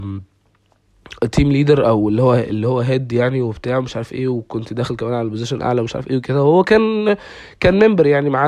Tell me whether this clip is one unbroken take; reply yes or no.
yes